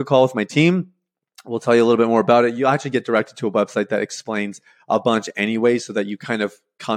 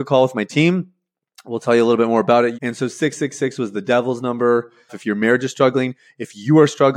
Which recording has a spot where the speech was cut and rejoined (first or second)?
second